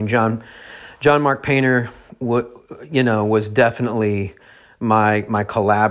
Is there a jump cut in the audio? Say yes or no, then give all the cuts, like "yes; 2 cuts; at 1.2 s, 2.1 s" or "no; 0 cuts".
no; 0 cuts